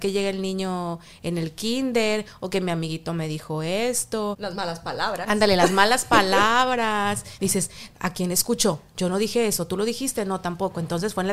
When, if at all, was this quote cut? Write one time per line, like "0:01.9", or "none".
none